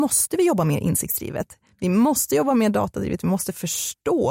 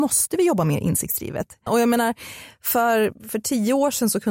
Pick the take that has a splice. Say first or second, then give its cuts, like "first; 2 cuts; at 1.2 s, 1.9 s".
second; 1 cut; at 1.7 s